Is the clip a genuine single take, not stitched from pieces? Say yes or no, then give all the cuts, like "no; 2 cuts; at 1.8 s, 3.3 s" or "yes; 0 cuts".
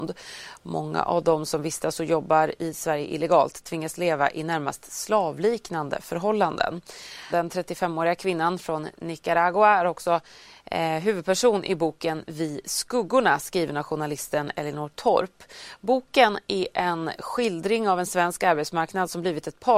no; 1 cut; at 7.3 s